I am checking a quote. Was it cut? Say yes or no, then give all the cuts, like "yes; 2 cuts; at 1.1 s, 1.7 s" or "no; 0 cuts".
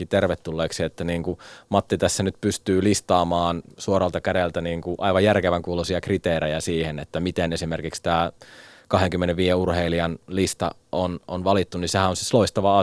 no; 0 cuts